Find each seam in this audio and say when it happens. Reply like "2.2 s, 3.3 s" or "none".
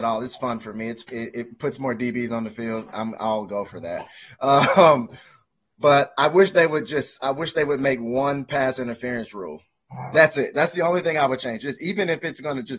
1.1 s